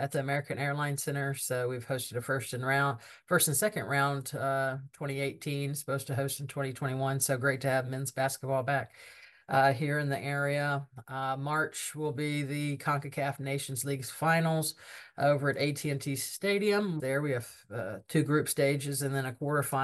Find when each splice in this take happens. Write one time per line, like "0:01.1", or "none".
0:17.0